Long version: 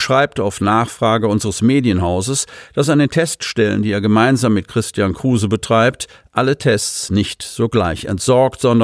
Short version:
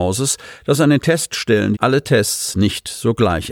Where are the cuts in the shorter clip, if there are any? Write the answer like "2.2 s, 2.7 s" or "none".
1.7 s